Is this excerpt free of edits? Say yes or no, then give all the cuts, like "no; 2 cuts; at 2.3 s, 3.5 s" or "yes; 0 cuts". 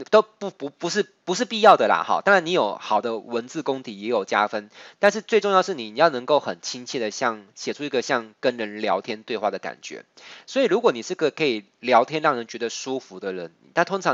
yes; 0 cuts